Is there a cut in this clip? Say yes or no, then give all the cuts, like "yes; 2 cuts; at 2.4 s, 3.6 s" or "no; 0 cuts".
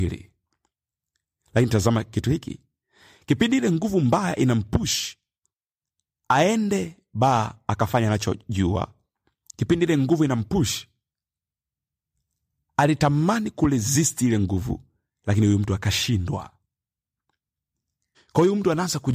yes; 1 cut; at 18.1 s